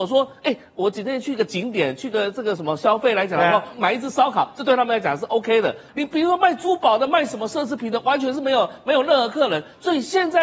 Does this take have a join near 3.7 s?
yes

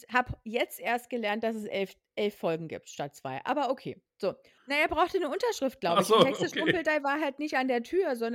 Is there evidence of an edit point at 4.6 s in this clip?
yes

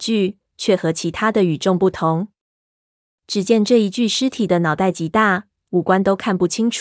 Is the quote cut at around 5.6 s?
yes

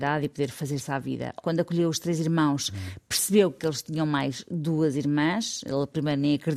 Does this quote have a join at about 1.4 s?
yes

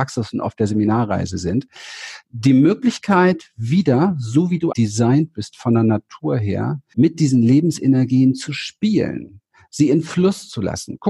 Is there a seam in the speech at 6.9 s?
yes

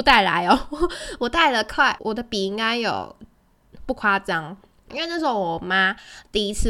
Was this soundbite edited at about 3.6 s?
no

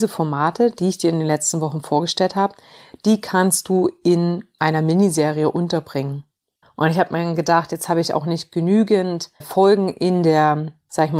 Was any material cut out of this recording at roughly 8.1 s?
no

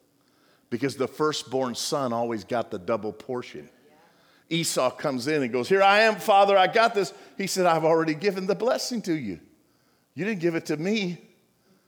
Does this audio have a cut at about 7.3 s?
no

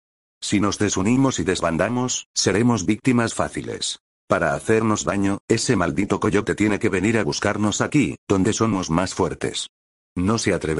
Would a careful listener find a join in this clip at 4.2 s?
yes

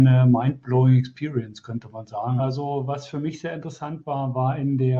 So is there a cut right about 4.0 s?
no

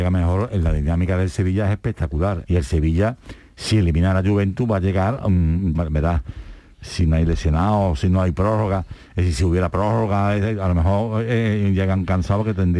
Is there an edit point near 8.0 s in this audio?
no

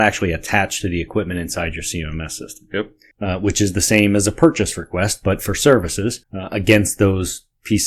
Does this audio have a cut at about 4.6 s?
no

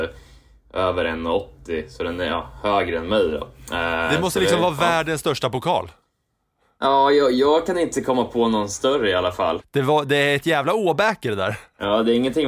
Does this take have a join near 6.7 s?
no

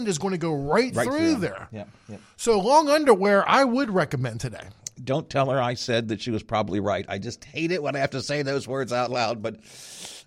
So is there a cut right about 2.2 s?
no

